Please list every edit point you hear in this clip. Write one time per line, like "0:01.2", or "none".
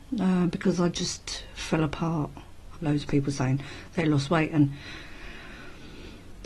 0:02.7